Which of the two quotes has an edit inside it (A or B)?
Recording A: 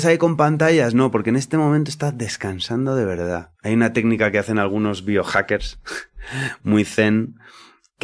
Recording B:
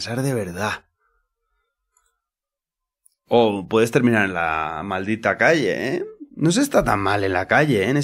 A